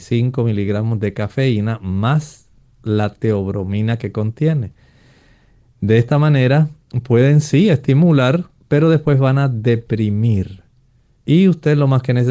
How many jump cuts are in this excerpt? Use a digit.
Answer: 0